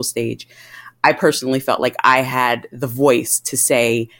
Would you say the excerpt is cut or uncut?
uncut